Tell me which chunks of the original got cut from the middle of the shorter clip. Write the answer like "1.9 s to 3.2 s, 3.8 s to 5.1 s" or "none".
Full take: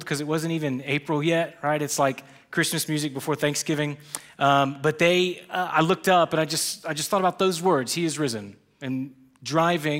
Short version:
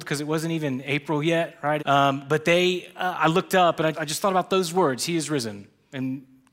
1.8 s to 4.3 s, 6.5 s to 6.8 s